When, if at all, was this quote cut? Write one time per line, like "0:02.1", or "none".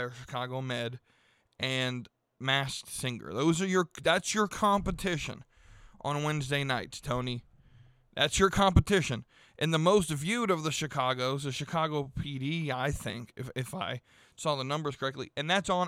0:13.5